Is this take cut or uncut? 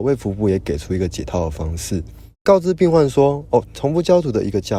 cut